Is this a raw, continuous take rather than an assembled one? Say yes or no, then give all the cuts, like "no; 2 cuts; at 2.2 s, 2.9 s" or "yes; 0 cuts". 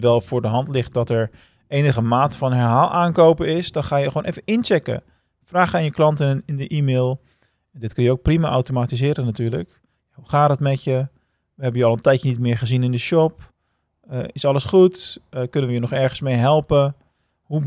yes; 0 cuts